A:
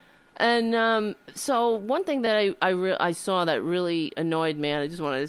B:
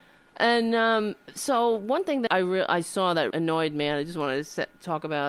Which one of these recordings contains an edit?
B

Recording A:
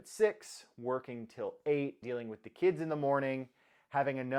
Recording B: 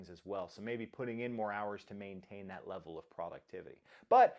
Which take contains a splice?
A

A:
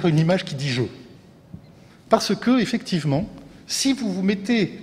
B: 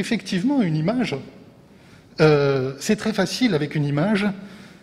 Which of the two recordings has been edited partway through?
A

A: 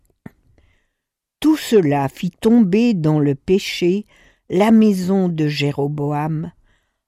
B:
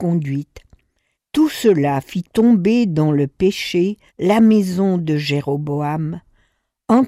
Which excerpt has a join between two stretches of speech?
B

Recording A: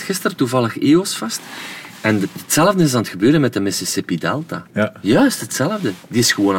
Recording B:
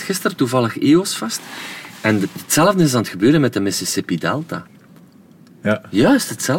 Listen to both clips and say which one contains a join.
A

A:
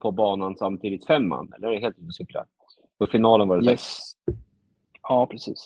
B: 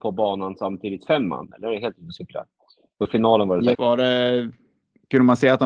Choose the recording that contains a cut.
B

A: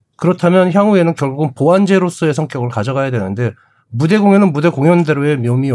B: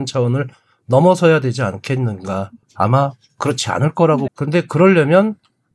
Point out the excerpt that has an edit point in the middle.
B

